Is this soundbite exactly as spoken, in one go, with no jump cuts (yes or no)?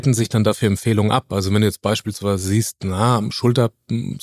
yes